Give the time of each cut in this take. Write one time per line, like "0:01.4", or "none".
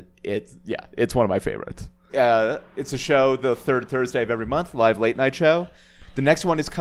0:02.1